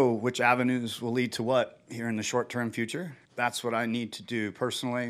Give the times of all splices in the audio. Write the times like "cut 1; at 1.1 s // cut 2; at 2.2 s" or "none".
cut 1; at 3.2 s